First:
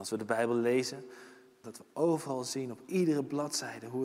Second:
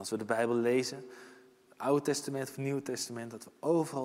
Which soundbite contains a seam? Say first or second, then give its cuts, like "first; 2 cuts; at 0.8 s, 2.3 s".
first; 1 cut; at 1.6 s